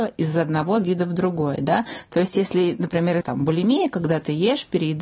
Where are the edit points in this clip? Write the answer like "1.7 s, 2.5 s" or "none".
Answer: 3.2 s